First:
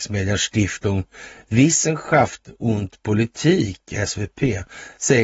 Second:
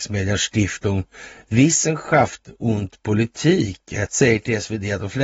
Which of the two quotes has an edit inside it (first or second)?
second